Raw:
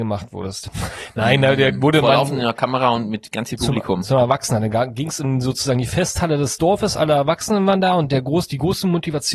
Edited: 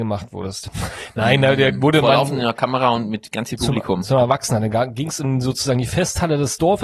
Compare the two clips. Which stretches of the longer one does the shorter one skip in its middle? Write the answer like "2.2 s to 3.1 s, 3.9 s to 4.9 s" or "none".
none